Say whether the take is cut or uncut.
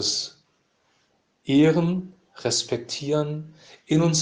uncut